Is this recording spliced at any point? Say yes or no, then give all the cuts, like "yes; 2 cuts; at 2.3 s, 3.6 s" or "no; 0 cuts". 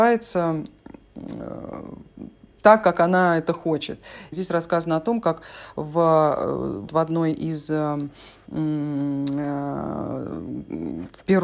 yes; 2 cuts; at 4.3 s, 6.9 s